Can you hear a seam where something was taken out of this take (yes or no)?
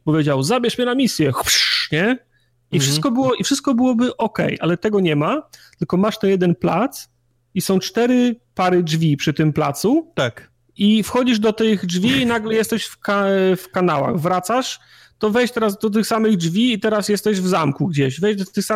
no